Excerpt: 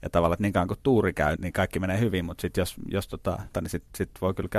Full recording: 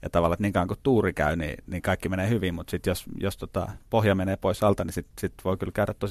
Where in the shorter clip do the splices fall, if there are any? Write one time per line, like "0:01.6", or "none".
0:01.4
0:03.5